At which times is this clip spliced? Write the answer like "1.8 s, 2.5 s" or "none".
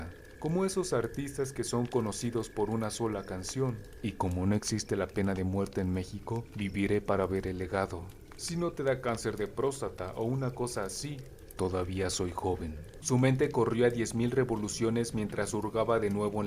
11.5 s, 13.0 s